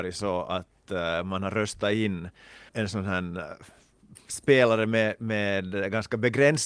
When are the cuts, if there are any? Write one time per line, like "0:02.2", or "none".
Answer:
0:02.7